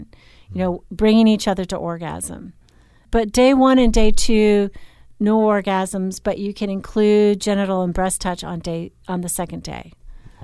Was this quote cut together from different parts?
no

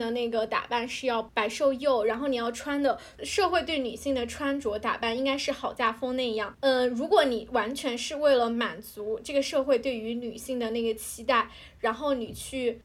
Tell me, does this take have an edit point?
no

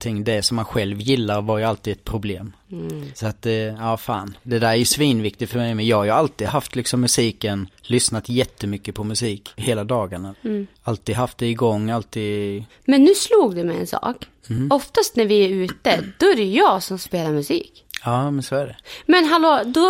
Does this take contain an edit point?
no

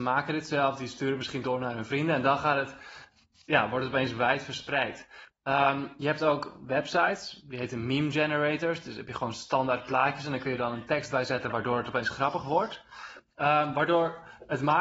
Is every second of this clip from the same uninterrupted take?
no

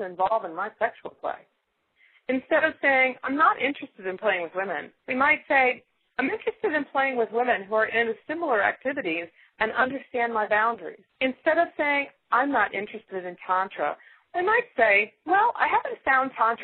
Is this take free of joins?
no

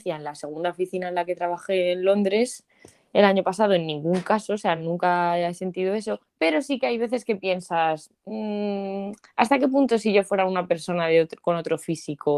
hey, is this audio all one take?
yes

